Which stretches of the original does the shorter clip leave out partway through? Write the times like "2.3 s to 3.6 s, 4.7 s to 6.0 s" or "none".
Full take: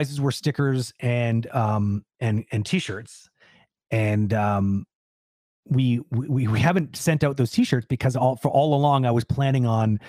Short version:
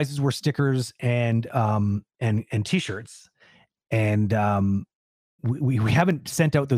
5.4 s to 6.1 s